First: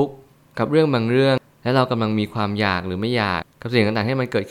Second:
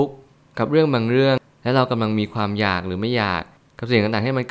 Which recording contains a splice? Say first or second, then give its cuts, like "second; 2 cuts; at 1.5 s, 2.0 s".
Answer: first; 1 cut; at 3.4 s